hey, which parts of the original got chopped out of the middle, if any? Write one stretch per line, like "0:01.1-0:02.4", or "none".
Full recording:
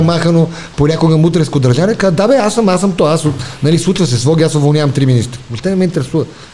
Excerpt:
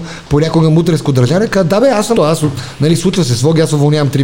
0:02.6-0:03.0

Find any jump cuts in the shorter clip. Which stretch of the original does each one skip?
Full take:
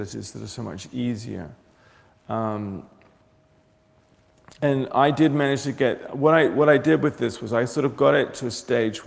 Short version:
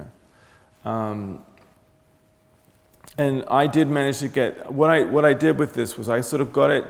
none

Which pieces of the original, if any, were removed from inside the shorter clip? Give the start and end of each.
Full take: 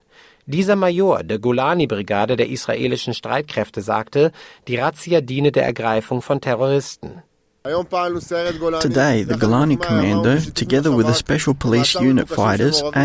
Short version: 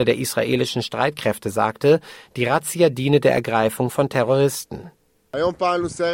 none

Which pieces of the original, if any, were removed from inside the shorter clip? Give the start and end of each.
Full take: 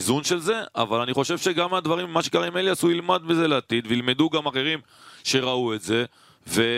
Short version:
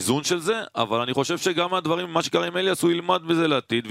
none

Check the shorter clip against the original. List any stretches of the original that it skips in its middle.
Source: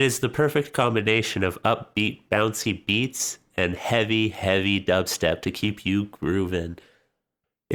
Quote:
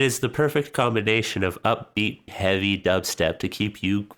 0:02.3-0:04.3

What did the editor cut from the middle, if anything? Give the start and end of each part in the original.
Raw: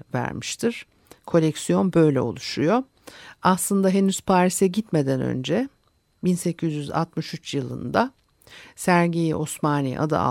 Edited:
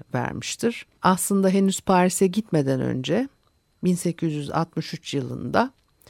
0:01.0-0:03.4

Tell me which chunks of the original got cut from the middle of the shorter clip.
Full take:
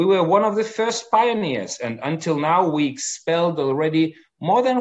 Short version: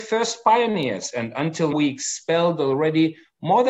0:02.4-0:02.7

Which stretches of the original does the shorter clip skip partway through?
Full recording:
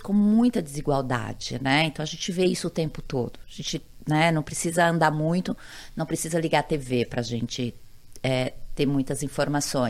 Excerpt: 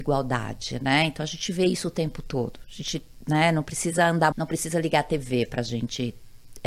0:05.1-0:05.9

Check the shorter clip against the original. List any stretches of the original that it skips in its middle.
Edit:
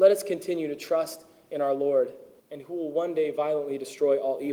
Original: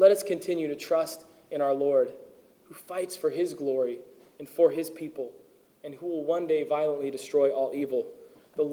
0:02.4-0:05.7

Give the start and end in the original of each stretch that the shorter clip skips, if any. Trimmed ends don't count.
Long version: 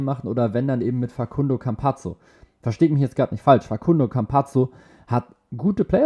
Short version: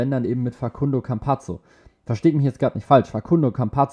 none

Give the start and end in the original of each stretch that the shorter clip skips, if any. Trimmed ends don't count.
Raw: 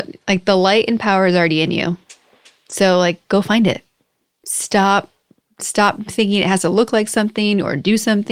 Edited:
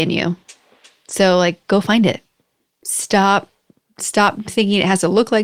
none

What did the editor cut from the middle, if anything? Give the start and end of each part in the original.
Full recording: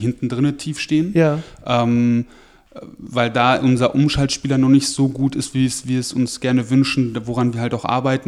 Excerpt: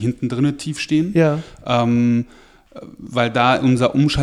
none

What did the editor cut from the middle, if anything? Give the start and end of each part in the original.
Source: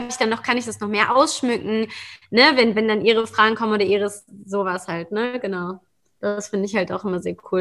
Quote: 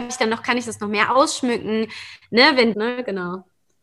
0:02.7-0:05.1

